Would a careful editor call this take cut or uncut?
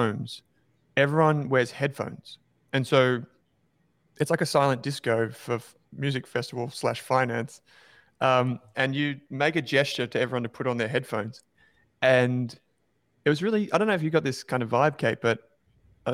uncut